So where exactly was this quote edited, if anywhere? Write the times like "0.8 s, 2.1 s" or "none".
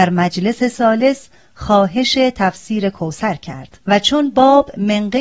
3.8 s